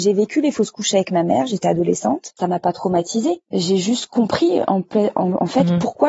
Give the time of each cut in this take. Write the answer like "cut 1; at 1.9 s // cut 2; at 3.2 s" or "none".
cut 1; at 3.4 s